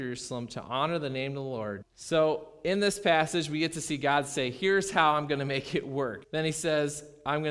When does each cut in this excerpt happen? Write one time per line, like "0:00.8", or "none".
0:01.8
0:06.2